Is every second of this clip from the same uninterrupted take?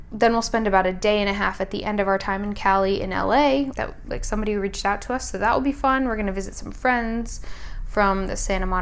no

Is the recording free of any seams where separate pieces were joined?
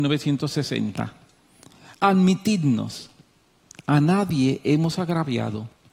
yes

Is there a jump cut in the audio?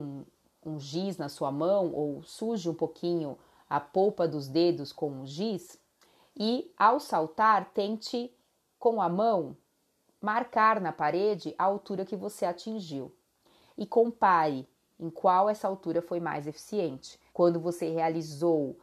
yes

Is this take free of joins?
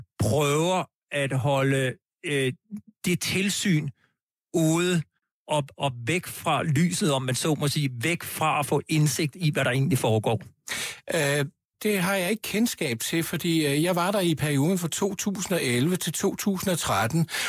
no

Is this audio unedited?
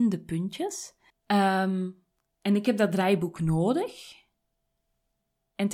no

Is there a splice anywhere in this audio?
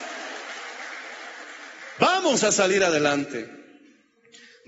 no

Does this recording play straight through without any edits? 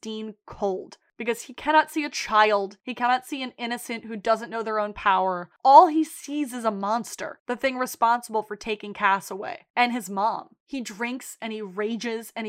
yes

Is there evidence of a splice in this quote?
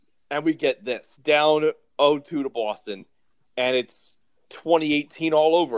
yes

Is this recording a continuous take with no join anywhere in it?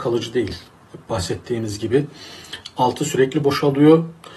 yes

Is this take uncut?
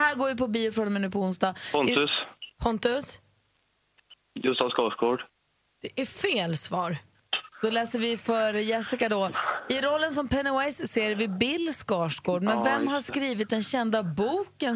yes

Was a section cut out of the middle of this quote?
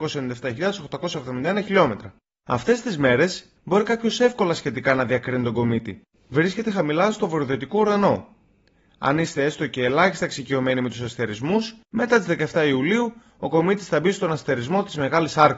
yes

